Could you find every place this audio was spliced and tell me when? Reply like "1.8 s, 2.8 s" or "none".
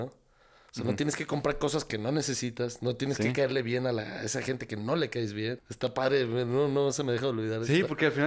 5.6 s